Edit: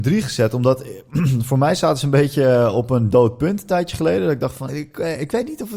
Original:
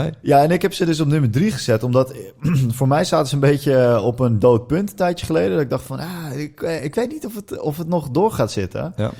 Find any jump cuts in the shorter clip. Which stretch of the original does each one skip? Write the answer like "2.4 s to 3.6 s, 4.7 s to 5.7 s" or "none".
6.0 s to 6.3 s